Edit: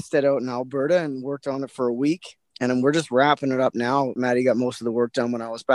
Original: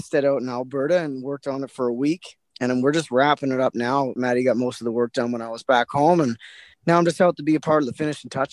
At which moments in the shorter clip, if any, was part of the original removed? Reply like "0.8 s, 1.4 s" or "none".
none